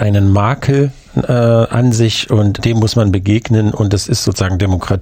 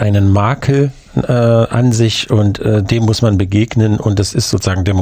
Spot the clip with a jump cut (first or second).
first